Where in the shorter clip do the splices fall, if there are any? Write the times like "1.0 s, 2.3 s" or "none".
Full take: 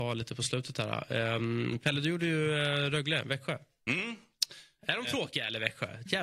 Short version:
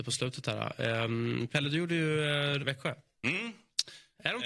2.6 s